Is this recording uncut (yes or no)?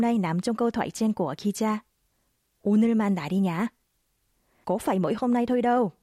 yes